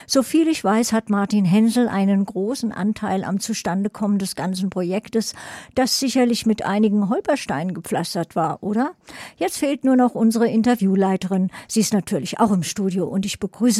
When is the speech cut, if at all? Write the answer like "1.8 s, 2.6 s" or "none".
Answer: none